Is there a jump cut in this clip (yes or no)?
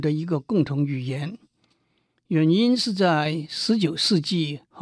no